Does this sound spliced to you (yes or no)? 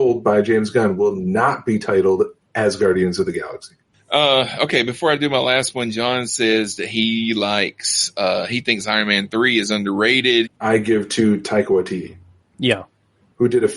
yes